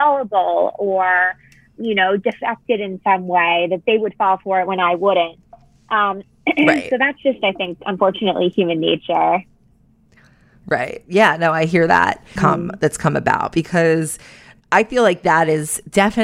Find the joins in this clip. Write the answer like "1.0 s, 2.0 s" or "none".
12.4 s

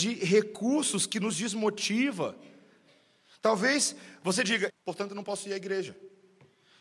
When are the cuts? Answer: 4.7 s

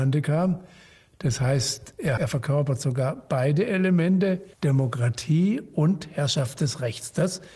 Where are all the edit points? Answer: 2.2 s, 4.5 s

